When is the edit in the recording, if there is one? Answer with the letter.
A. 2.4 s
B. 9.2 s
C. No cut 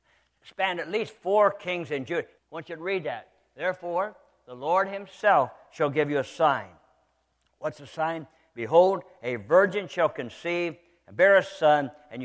A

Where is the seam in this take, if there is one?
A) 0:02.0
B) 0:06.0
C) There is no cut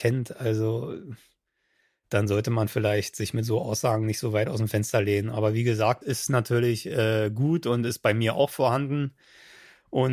B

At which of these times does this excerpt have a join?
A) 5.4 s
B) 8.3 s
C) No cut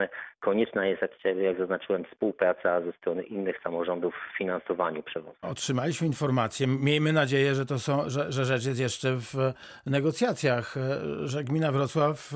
A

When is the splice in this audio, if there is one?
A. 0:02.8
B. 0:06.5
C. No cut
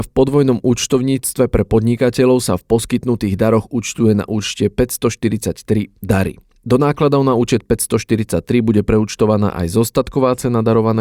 C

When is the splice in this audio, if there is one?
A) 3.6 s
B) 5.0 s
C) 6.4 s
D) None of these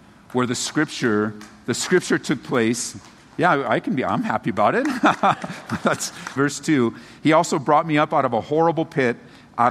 C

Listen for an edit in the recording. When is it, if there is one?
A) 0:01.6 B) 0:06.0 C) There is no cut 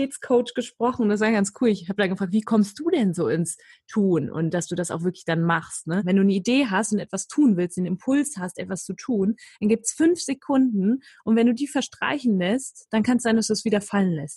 B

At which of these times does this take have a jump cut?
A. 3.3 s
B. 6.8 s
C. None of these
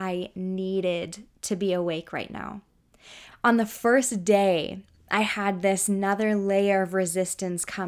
A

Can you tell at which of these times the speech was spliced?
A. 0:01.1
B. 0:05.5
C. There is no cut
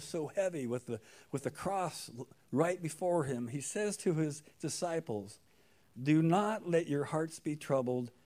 C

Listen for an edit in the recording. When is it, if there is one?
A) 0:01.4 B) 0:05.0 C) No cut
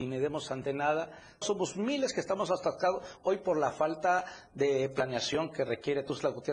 A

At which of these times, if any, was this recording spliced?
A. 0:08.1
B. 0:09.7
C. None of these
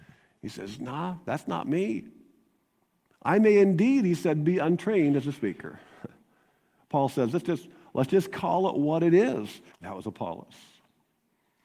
B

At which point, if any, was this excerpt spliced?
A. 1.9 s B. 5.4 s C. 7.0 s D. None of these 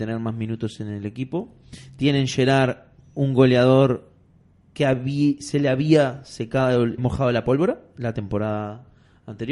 C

